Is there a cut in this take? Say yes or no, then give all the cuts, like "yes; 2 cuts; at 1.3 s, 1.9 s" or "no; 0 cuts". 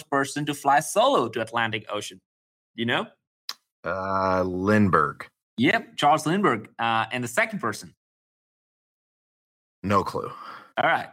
no; 0 cuts